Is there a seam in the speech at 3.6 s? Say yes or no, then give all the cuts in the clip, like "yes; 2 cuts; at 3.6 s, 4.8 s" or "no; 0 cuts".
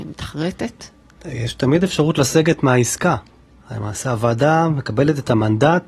no; 1 cut; at 1.2 s